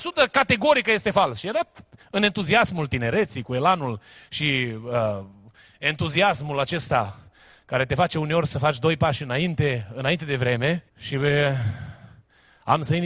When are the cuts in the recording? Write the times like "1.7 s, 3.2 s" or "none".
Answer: 10.9 s